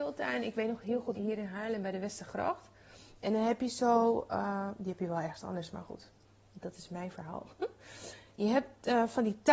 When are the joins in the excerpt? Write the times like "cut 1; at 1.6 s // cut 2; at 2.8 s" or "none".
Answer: cut 1; at 1.2 s